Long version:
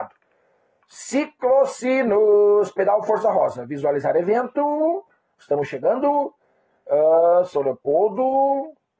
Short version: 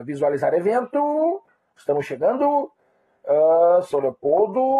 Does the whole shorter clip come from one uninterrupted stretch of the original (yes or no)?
yes